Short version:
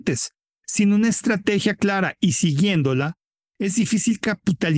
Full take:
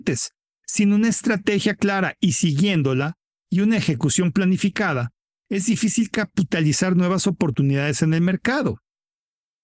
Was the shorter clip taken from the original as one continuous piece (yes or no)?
no